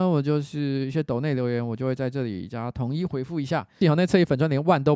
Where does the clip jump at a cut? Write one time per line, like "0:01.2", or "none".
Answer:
0:03.8